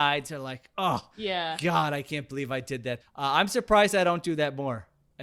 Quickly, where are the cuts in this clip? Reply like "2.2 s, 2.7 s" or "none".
3.0 s